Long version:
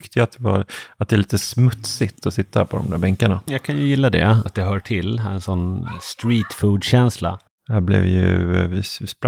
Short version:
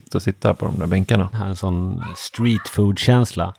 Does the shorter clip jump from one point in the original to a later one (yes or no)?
yes